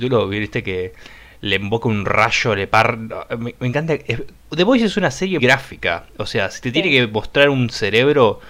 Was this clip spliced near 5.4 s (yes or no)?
yes